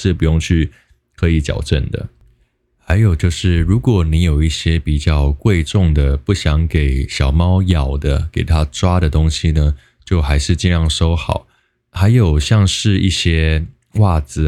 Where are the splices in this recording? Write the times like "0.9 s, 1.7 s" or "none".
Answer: none